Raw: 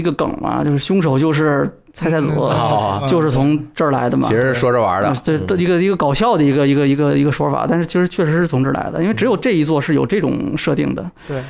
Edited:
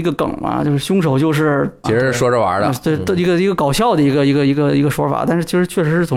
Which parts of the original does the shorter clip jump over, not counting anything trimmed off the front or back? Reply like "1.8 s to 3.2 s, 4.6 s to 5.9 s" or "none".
1.8 s to 4.3 s